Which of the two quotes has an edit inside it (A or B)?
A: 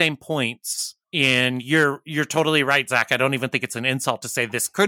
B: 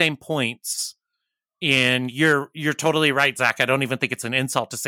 A